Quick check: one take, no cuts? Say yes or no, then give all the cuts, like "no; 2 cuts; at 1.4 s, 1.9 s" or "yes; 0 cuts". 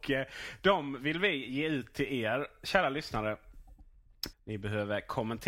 no; 1 cut; at 4.3 s